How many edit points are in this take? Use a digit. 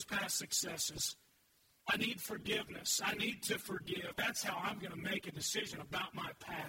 2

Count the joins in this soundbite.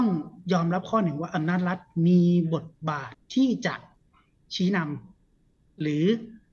1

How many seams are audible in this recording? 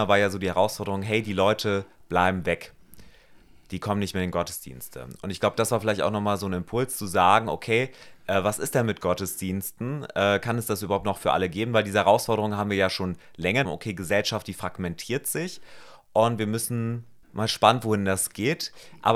2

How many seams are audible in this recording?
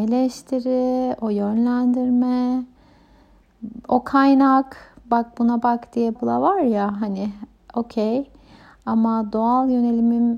1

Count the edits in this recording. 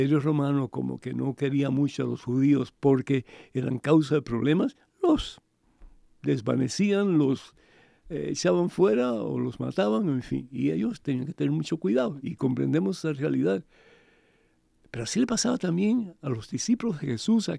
0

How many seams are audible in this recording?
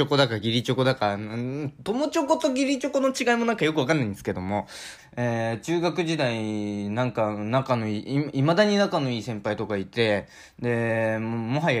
1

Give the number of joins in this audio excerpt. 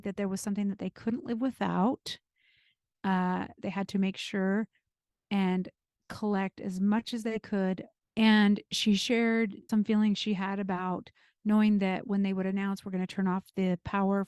3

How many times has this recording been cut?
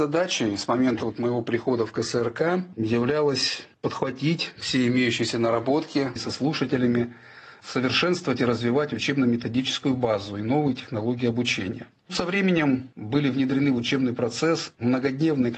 1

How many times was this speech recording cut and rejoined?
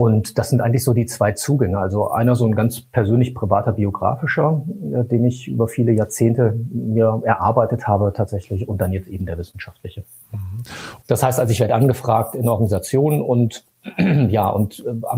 1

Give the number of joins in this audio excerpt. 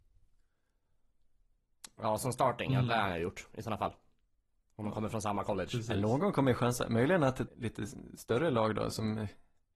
1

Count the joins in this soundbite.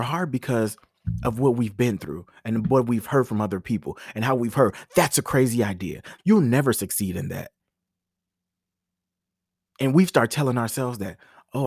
1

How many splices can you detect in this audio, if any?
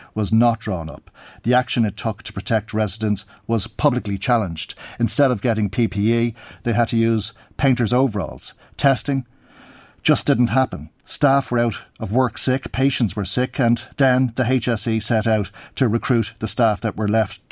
0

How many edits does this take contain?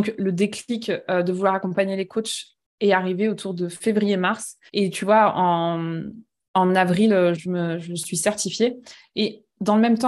2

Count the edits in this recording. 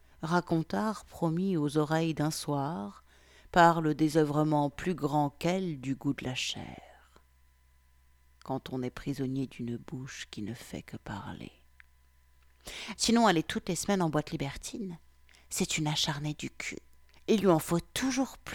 1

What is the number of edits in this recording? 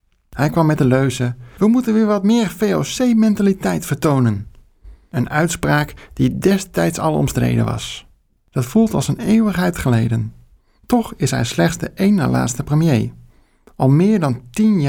1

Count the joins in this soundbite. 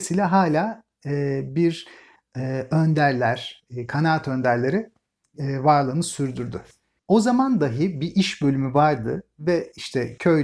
1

